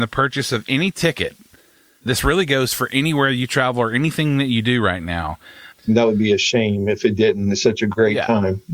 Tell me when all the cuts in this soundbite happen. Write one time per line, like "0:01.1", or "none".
0:05.7